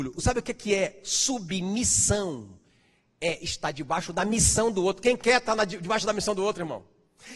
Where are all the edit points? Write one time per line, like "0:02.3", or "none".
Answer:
none